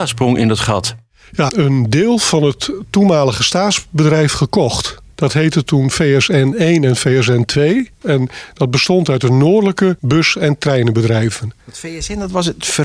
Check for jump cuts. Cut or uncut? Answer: cut